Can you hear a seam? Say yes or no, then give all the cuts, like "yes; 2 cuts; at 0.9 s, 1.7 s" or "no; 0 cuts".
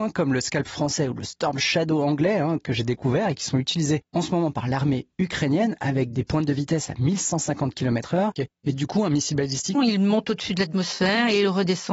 yes; 2 cuts; at 8.4 s, 9.7 s